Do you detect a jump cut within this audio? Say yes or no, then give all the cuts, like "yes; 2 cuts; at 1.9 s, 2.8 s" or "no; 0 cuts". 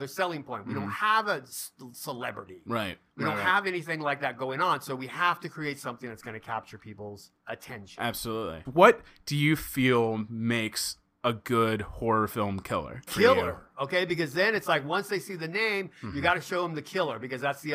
yes; 2 cuts; at 8.6 s, 13.1 s